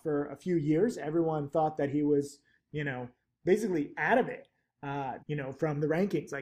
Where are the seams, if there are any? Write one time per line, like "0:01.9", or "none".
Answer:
0:05.2